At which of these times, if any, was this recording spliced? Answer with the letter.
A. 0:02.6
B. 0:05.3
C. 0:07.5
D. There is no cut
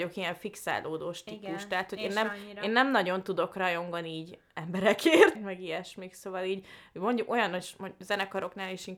B